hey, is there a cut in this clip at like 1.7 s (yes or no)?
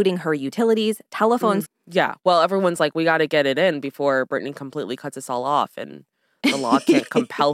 yes